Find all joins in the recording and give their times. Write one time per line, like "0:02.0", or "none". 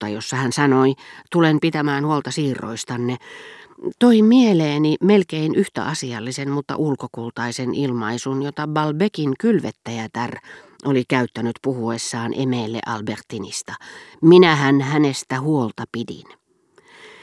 none